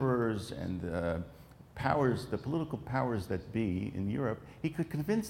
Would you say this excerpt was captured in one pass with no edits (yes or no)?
yes